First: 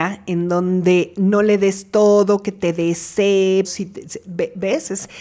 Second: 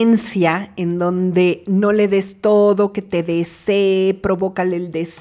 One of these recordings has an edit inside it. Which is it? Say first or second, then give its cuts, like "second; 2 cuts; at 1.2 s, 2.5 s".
first; 1 cut; at 3.6 s